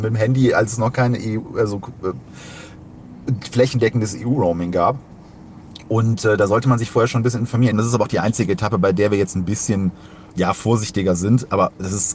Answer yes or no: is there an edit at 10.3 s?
yes